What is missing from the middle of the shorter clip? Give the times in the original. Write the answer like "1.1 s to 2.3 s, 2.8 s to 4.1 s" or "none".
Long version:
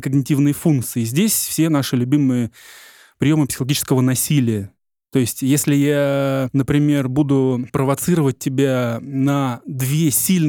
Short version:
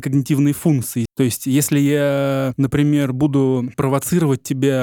1.1 s to 5.0 s

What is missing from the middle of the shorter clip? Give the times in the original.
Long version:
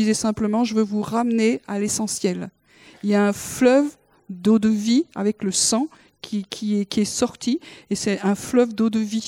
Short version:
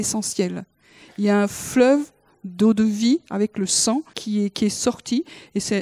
6.0 s to 6.5 s

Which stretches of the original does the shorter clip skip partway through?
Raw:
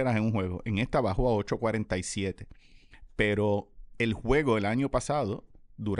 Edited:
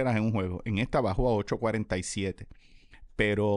none

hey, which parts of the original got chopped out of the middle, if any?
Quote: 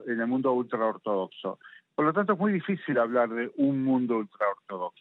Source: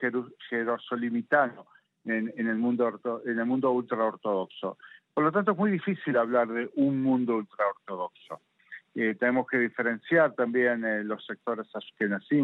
none

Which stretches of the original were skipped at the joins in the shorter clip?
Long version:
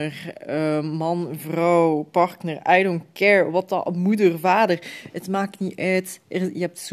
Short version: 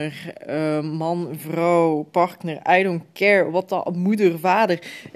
none

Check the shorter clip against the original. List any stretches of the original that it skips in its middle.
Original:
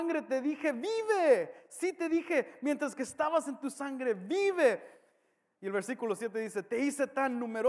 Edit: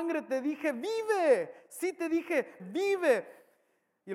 2.6 s to 4.1 s

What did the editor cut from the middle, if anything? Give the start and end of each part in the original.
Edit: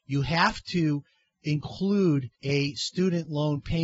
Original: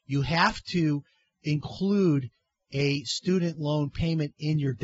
2.3 s to 2.6 s

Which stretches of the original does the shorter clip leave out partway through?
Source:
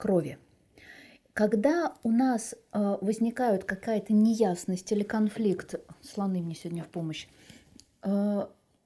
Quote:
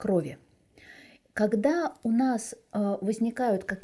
none

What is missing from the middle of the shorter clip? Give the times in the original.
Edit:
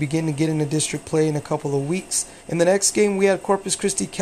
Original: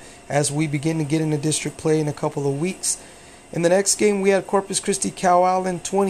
3.1 s to 3.4 s

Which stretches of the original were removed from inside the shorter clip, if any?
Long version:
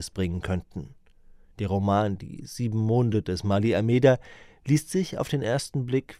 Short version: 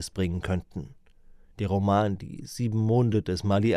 none

